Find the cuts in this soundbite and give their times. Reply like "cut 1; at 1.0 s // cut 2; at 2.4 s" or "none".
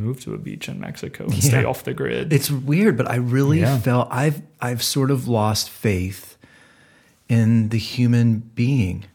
none